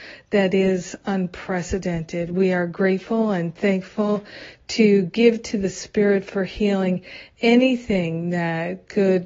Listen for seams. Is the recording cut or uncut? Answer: uncut